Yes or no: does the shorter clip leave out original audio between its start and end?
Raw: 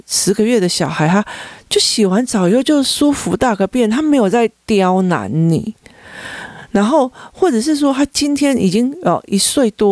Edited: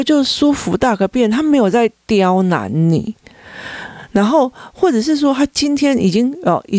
no